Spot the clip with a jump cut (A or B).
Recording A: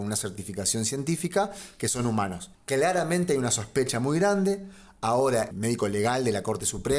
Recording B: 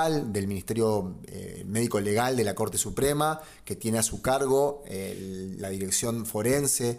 A